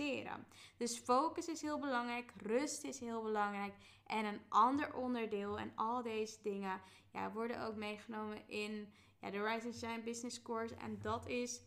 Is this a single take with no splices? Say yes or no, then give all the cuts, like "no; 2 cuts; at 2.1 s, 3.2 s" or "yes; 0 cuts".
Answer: yes; 0 cuts